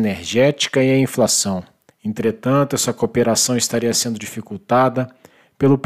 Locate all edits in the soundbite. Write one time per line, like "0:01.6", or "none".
0:01.9